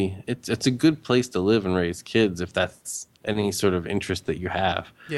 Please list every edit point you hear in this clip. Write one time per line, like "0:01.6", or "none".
none